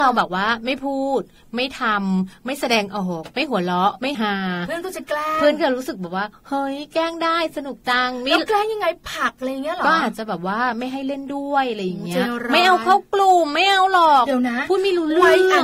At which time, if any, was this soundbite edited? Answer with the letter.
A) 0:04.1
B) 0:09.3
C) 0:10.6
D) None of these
A